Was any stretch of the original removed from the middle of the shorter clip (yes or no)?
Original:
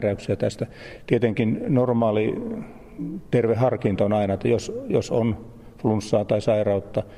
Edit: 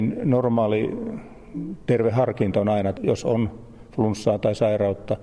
yes